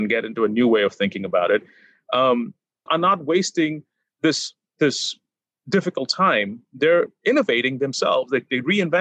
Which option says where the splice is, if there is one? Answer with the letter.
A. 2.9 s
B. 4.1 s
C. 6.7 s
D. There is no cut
A